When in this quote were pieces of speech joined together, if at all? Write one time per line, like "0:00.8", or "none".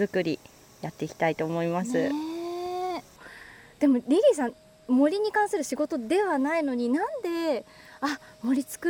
none